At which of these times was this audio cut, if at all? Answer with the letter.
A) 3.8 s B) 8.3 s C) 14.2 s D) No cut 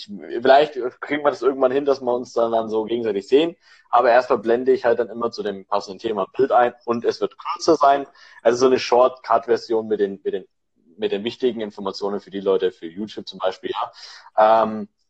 D